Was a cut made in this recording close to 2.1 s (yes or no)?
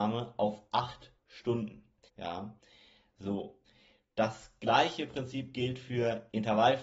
yes